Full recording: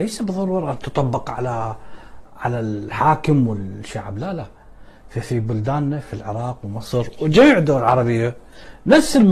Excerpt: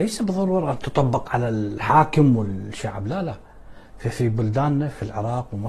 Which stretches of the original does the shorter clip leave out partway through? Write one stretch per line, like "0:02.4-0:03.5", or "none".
0:01.2-0:02.4